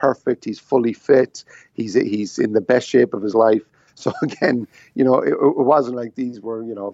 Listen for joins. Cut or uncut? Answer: cut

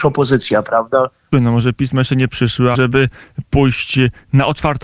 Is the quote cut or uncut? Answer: cut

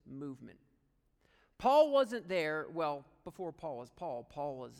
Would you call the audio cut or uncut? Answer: uncut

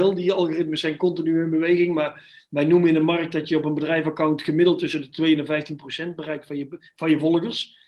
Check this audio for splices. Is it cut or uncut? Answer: uncut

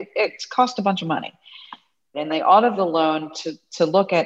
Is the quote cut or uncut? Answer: cut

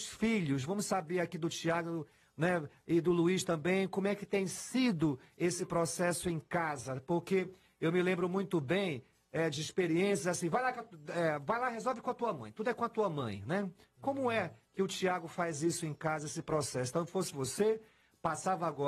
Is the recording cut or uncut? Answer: uncut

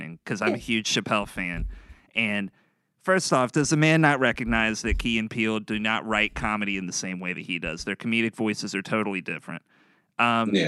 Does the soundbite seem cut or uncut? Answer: uncut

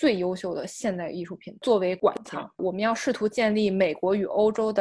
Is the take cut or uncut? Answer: uncut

